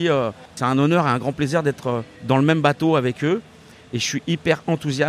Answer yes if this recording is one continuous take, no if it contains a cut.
no